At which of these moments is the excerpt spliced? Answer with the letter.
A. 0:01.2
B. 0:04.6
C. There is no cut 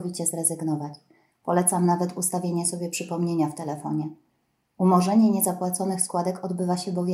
C